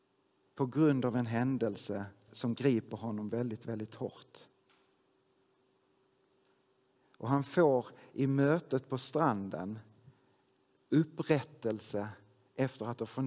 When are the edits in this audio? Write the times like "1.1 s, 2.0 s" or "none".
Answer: 2.3 s